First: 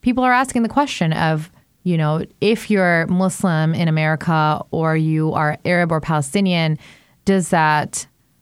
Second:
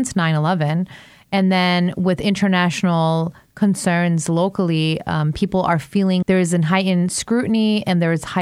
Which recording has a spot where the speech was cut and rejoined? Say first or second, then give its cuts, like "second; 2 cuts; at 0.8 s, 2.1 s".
second; 1 cut; at 6.2 s